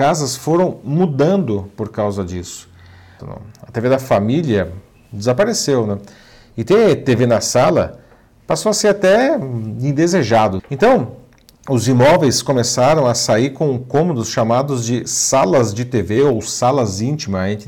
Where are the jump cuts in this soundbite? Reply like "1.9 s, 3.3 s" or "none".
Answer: 3.2 s, 10.6 s